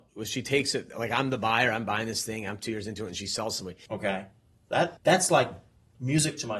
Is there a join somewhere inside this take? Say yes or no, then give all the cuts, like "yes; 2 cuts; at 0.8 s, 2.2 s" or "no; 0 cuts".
yes; 2 cuts; at 3.9 s, 5.0 s